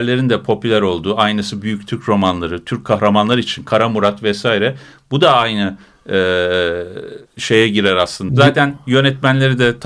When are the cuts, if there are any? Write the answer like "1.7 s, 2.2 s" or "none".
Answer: 7.3 s, 8.3 s